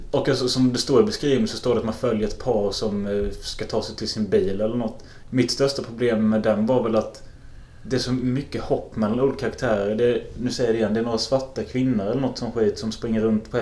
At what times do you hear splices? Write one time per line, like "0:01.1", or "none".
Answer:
0:05.2